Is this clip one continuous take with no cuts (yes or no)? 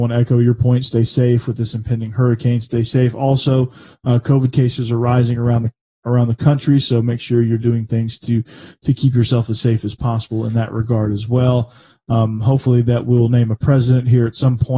yes